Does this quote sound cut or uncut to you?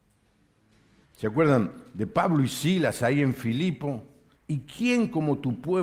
cut